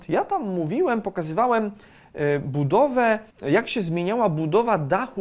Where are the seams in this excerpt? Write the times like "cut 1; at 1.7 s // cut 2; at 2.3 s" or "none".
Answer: cut 1; at 3.3 s